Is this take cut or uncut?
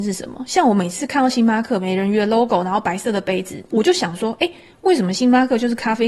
uncut